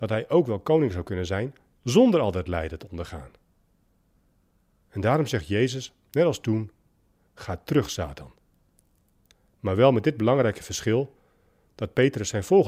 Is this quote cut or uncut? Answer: uncut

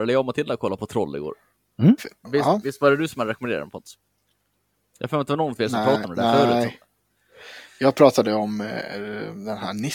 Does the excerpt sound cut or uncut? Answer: cut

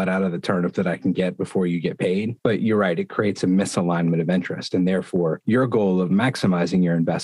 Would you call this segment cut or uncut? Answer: cut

